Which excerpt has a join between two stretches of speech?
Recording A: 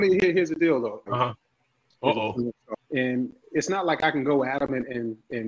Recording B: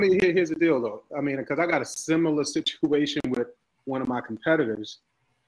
A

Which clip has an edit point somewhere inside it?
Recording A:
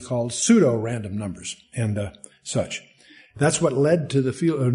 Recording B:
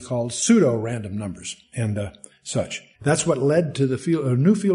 B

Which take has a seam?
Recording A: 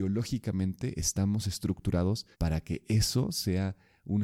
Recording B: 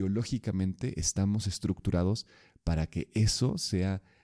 A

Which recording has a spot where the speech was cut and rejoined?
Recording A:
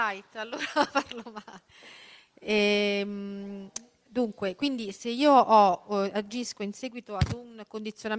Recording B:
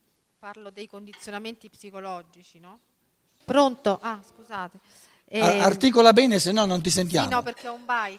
B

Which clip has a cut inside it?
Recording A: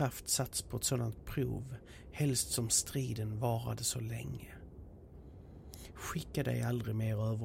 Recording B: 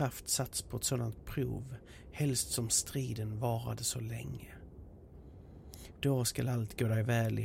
B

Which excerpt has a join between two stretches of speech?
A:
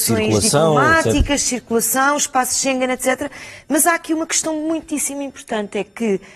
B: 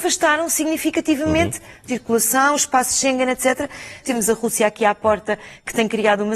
B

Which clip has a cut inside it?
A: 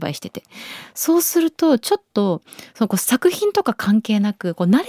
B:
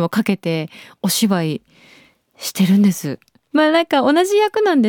B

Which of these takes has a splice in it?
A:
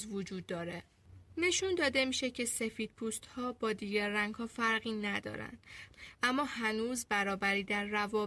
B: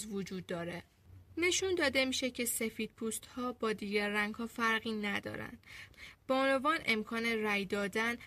A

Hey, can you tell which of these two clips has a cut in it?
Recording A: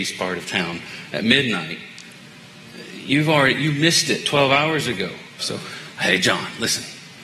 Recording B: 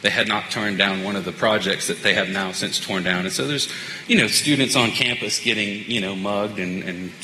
A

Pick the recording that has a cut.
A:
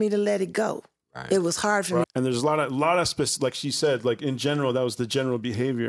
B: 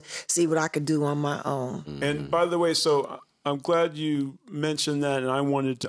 A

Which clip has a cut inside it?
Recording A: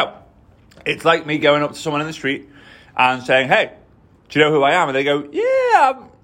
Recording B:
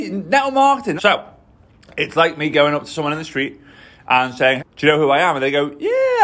B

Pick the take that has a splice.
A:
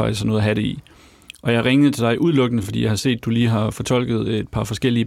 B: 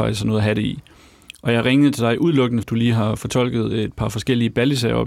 B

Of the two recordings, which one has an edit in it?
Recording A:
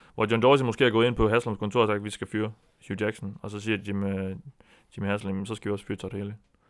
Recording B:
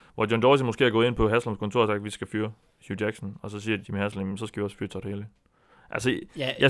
B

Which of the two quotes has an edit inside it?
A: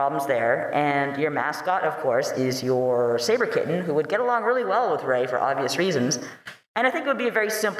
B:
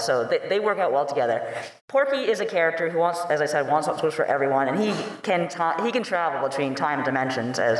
B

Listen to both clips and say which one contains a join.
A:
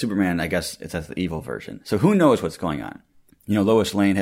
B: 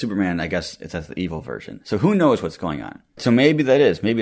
B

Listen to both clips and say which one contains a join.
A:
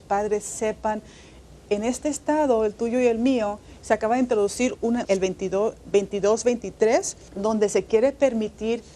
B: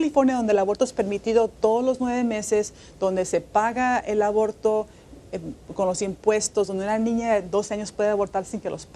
A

